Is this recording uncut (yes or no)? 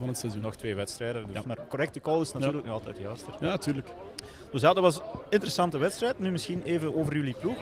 no